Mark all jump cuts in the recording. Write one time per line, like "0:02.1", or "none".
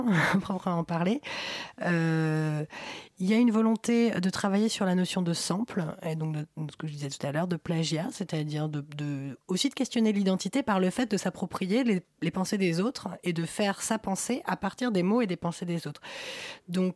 none